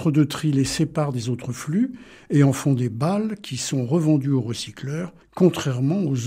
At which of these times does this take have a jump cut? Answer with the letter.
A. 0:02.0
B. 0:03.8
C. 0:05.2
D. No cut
C